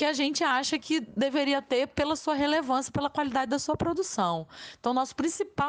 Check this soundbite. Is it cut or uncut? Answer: uncut